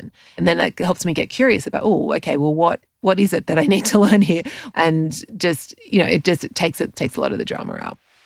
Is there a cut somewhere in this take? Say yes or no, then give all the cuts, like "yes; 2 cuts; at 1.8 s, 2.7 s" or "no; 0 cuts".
yes; 1 cut; at 4.7 s